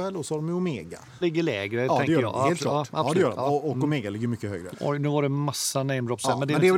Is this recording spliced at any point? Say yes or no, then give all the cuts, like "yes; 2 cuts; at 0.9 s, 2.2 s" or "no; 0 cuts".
yes; 2 cuts; at 1.2 s, 4.7 s